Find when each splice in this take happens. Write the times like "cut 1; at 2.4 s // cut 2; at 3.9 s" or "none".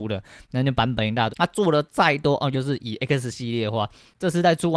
cut 1; at 1.3 s // cut 2; at 2.5 s